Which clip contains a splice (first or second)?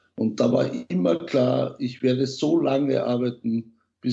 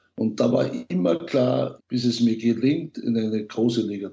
second